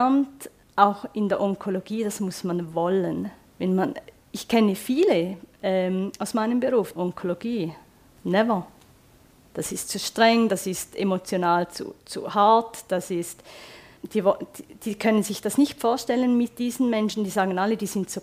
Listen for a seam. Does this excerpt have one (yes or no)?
yes